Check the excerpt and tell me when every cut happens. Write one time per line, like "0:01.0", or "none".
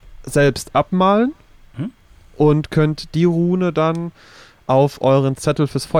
none